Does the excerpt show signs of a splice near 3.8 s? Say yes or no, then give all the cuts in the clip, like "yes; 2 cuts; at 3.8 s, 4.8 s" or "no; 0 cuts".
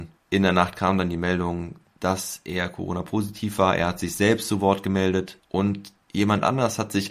no; 1 cut; at 5.4 s